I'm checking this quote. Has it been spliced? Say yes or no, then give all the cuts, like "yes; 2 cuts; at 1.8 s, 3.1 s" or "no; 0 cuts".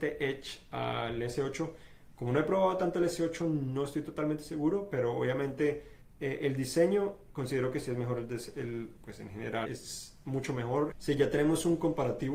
yes; 2 cuts; at 9.6 s, 10.9 s